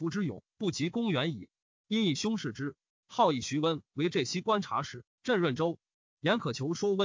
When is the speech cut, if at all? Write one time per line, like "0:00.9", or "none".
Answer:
none